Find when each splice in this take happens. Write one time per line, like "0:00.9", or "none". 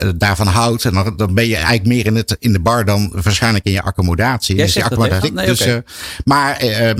0:05.2